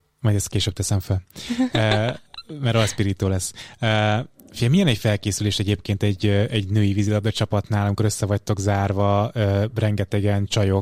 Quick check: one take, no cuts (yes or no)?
yes